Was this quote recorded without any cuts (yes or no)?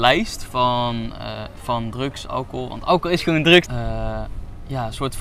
no